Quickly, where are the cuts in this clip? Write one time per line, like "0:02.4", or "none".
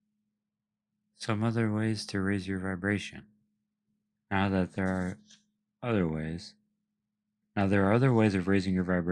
0:07.4